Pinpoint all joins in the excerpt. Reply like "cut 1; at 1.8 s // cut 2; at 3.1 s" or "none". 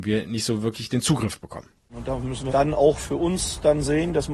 cut 1; at 2.5 s